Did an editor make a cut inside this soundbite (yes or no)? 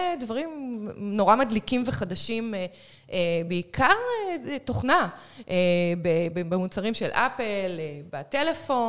no